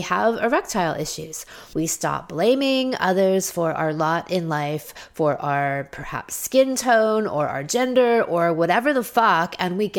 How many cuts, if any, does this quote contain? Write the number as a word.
one